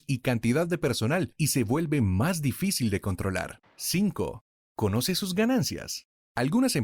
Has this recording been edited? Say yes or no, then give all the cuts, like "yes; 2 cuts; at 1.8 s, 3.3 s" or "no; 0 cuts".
yes; 1 cut; at 3.6 s